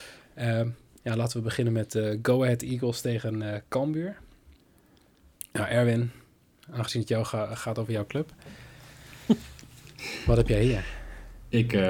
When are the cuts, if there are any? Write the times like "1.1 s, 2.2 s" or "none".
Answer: none